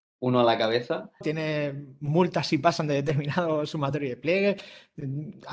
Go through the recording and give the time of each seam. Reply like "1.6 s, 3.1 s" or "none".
1.2 s